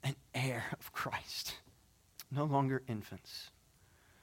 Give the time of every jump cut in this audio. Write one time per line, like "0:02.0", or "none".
0:02.2